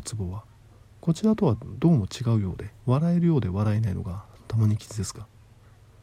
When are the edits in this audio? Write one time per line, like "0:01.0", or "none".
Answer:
0:02.8

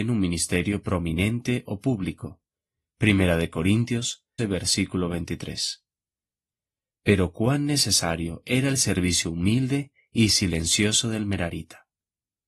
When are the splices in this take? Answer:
0:04.4

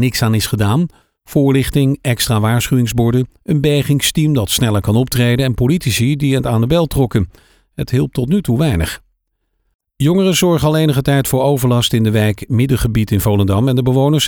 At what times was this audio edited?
none

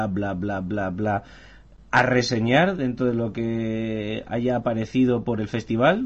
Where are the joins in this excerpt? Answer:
none

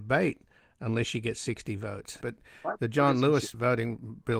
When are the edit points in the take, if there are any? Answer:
0:02.2

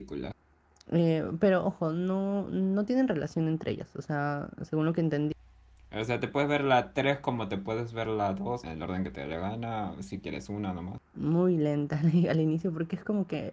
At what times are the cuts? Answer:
0:08.6
0:11.0

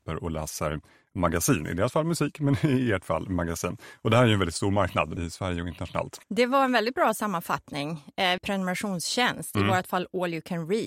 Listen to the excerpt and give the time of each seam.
0:05.2
0:06.2
0:08.4

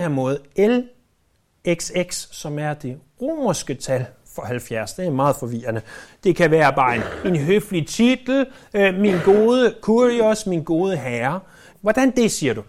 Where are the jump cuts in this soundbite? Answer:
0:06.1
0:11.7

